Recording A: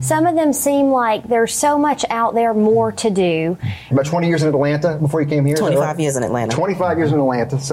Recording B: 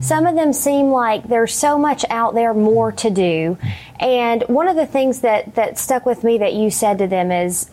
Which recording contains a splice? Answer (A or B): A